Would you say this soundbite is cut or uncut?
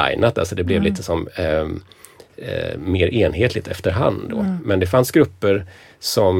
uncut